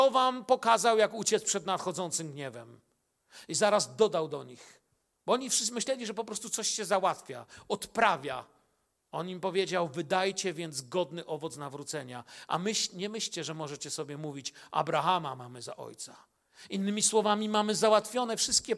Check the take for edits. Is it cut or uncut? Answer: uncut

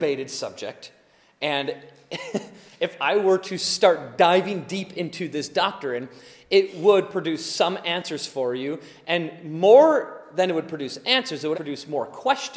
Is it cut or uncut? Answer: cut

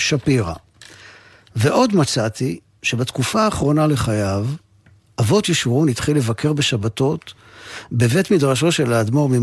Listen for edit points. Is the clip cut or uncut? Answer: uncut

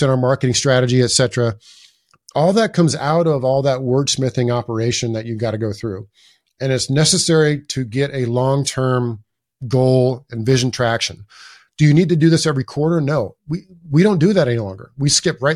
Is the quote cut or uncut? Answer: uncut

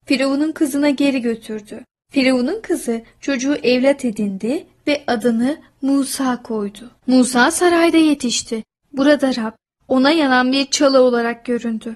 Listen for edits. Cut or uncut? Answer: cut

